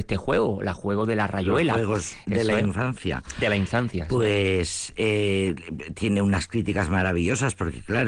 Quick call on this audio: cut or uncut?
uncut